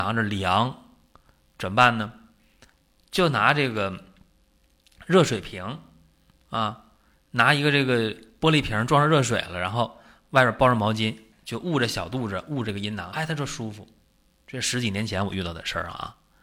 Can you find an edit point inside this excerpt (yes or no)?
yes